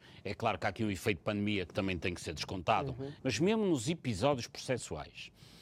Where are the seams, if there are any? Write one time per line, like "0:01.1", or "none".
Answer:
0:03.2

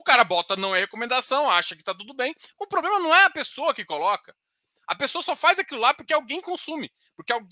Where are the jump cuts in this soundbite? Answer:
none

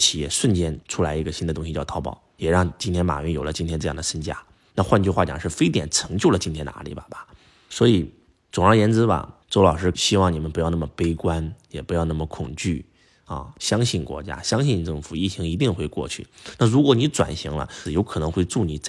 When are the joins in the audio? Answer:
0:16.6
0:17.9

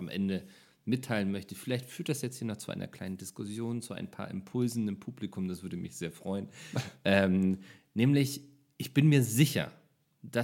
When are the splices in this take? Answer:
none

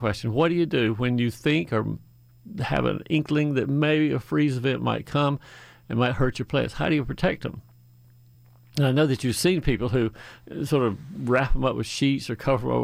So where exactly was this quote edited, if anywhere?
none

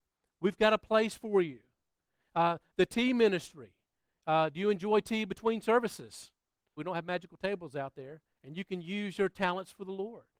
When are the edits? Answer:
0:06.8
0:08.3

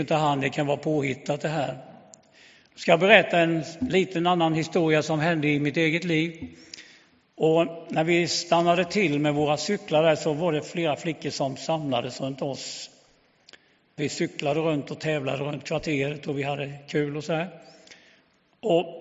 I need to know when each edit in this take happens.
0:07.2
0:14.0

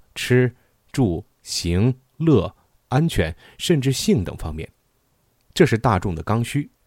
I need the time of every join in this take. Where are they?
none

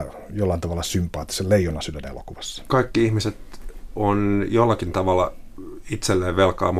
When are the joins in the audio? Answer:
none

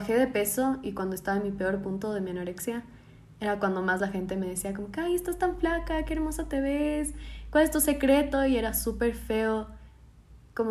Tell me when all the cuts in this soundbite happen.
none

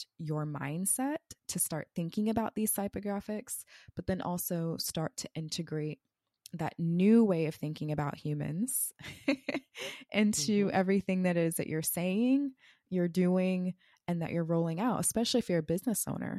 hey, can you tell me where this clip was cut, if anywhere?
none

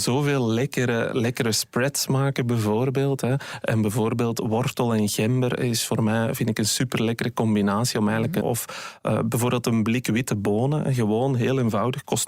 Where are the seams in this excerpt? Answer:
0:08.4

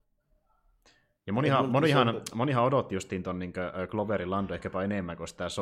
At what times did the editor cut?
none

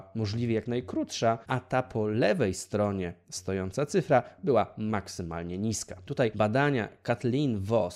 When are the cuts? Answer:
0:06.1

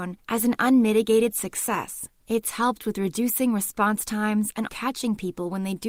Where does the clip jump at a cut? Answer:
0:04.7

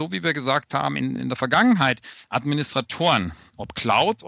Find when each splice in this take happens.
none

